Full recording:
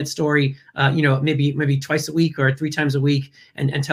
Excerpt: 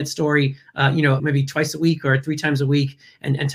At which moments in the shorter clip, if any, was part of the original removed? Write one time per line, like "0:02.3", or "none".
0:01.2